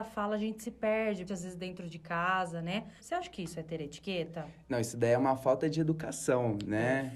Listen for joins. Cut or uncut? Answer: cut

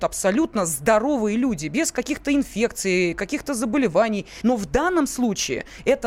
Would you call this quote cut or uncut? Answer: cut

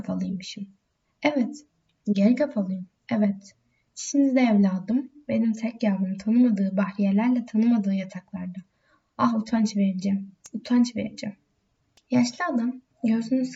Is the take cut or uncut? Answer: cut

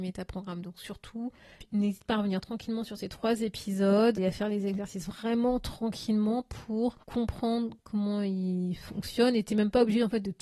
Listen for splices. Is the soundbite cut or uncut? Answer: cut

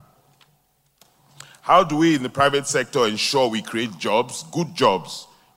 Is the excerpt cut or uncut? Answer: uncut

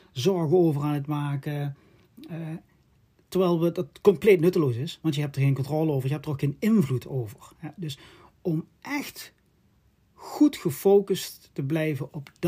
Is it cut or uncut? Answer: uncut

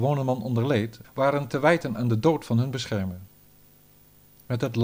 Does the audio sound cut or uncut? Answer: cut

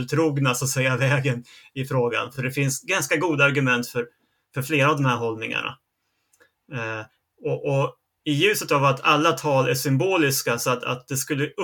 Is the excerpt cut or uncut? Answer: uncut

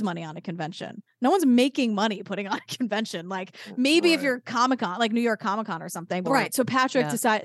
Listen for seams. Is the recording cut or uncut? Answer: cut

